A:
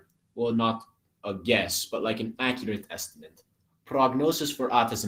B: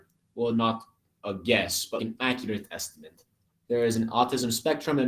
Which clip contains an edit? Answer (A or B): B